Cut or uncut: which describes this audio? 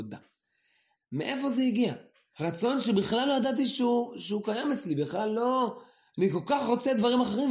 cut